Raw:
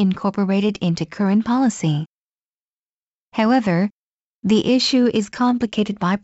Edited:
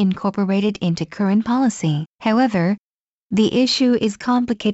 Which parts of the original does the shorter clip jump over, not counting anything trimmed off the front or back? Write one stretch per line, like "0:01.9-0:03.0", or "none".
0:02.1-0:03.3

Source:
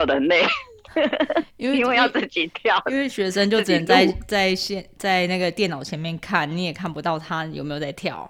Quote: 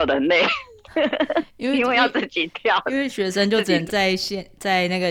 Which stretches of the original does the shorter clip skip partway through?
0:03.9-0:04.3

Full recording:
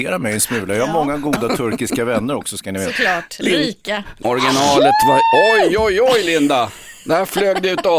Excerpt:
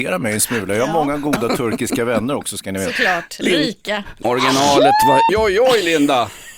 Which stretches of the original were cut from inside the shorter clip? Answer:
0:05.3-0:05.7

